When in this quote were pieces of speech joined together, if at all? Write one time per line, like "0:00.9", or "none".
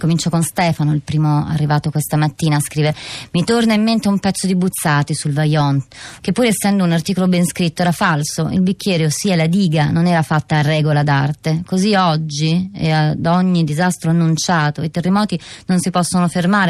0:06.2